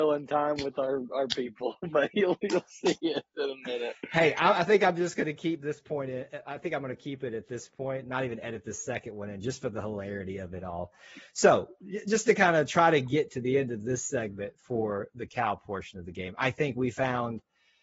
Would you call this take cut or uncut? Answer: uncut